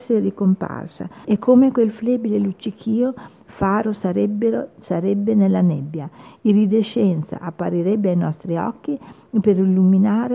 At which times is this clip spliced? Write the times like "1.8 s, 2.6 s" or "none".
1.2 s